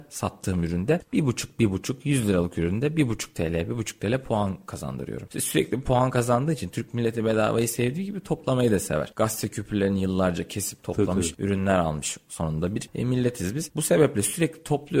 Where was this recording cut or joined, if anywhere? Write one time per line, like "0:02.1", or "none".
none